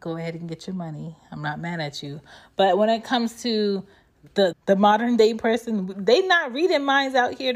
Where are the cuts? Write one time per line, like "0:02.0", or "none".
0:04.5